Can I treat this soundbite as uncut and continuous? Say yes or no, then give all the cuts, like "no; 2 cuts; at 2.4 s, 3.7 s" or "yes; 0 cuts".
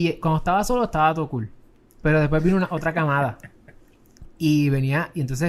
yes; 0 cuts